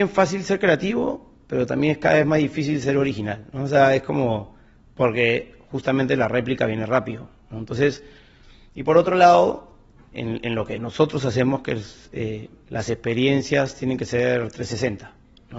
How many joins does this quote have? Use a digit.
2